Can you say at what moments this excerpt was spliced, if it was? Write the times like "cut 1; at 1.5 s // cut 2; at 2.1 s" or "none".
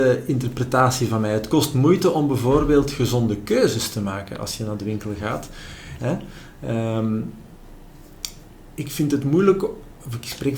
cut 1; at 6.0 s